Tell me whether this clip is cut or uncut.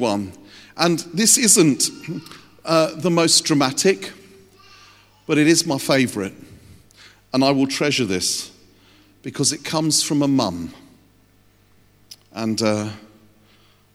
uncut